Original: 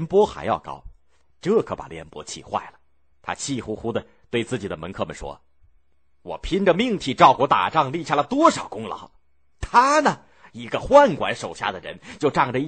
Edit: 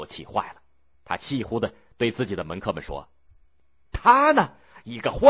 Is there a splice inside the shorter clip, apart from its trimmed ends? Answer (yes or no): yes